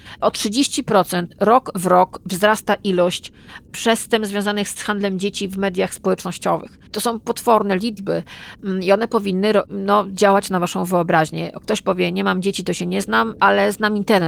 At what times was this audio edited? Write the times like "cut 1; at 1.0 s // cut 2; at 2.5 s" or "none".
cut 1; at 6.9 s